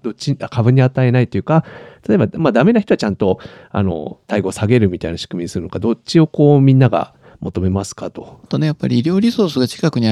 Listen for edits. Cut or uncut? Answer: cut